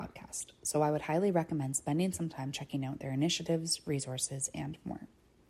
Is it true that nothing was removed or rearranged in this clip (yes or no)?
yes